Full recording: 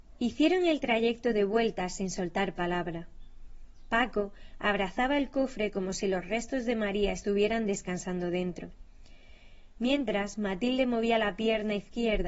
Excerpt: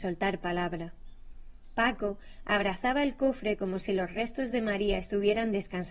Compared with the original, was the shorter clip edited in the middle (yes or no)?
no